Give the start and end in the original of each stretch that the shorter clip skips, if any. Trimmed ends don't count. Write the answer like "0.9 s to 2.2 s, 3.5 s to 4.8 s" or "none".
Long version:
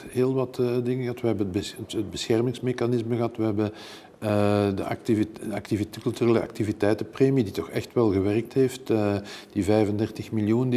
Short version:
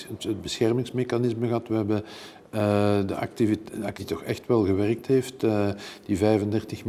5.7 s to 7.5 s